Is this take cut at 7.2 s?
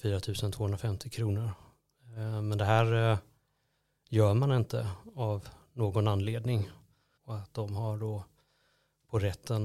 yes; 1 cut; at 7.2 s

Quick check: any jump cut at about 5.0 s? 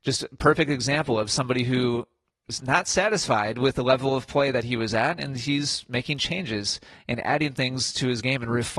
no; 1 cut; at 2.6 s

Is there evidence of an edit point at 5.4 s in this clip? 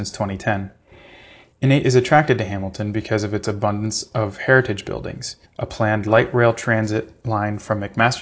yes; 2 cuts; at 1.5 s, 5.4 s

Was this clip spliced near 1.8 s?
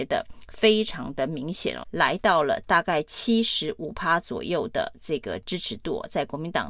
yes; 1 cut; at 1.8 s

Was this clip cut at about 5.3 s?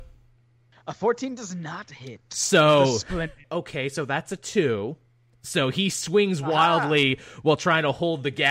no; 1 cut; at 3.4 s

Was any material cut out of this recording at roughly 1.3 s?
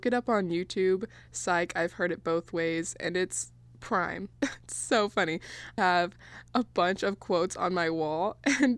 no; 2 cuts; at 4.3 s, 5.8 s

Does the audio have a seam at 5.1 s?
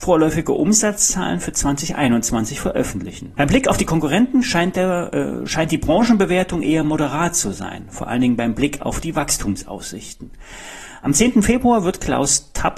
no; 1 cut; at 3.4 s

